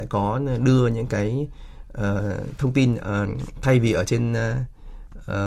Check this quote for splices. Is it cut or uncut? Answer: uncut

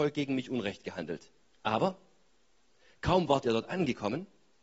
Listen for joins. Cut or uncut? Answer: cut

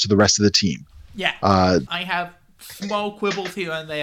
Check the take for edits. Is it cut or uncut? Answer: cut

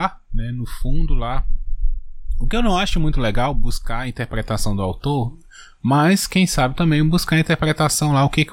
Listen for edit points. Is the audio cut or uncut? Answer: uncut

